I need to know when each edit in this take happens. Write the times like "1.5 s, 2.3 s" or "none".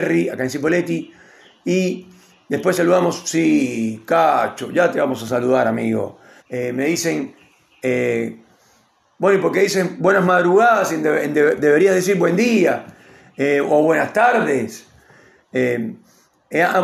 6.4 s